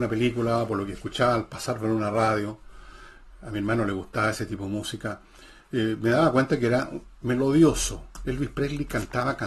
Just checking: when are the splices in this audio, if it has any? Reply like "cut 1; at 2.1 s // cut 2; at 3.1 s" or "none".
none